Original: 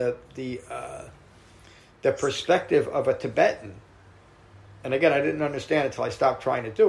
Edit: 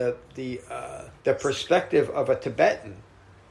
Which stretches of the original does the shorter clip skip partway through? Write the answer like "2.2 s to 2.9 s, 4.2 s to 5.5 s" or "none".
1.2 s to 2.0 s